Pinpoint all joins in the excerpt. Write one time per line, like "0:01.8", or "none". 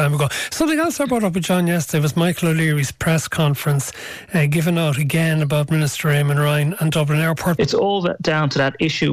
0:07.6